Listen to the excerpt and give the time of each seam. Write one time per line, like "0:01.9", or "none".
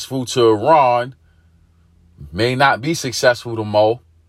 none